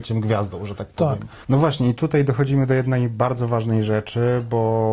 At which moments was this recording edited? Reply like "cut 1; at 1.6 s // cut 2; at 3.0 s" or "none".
cut 1; at 1.4 s